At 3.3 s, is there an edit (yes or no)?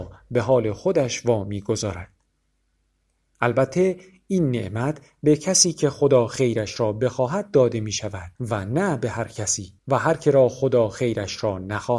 no